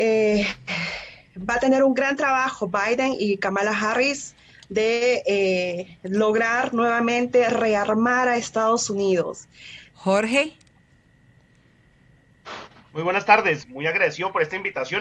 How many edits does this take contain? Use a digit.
2